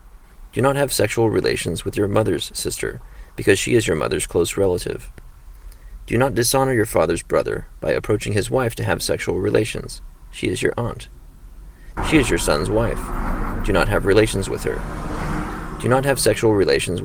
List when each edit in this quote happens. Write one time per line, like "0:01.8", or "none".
0:12.0